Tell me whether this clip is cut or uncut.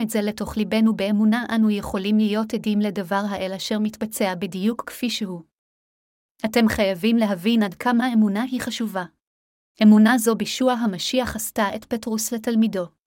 cut